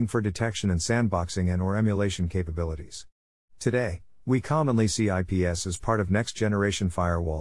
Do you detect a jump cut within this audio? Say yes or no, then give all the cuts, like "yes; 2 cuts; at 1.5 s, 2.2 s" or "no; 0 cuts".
no; 0 cuts